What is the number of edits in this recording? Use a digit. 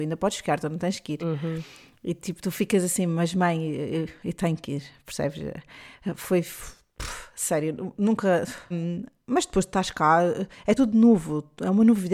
2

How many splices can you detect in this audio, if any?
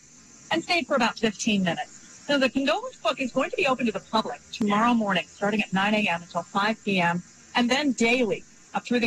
0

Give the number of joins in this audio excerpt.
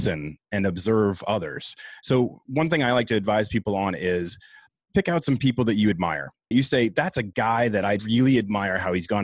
2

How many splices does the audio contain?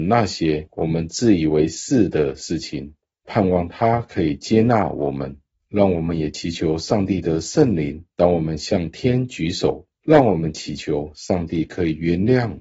2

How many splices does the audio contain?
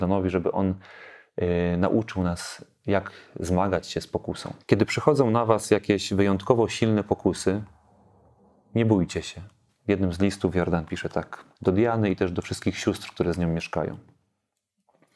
3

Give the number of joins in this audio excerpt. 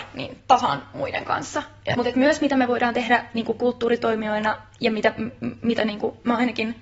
1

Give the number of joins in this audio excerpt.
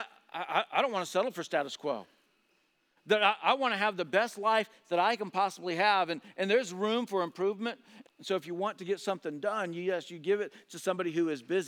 1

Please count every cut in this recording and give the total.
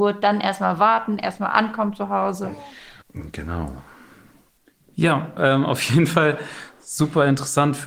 1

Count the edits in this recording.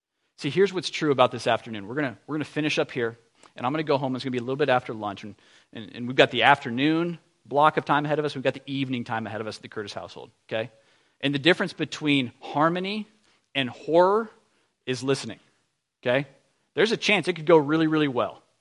1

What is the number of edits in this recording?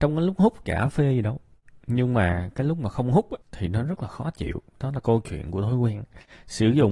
2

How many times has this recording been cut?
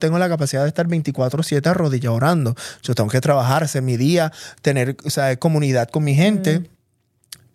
0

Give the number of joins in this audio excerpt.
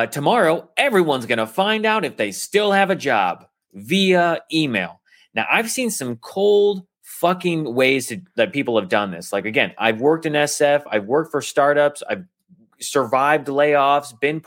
0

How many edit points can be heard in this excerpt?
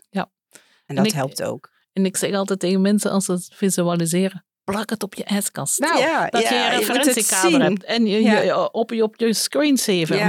0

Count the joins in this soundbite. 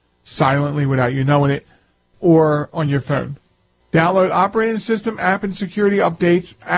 2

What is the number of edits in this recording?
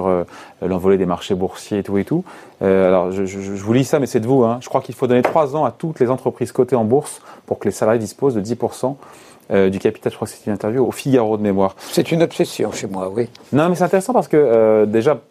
1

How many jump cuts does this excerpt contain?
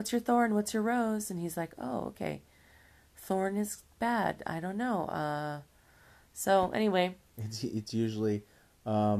0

